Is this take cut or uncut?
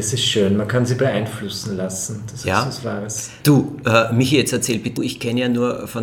cut